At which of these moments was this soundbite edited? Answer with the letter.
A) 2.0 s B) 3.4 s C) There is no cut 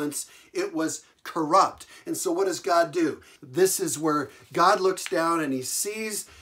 B